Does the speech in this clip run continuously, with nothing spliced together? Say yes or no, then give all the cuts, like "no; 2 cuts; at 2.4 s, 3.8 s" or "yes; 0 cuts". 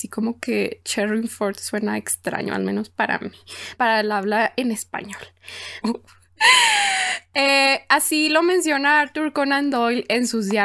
no; 2 cuts; at 3.8 s, 5.8 s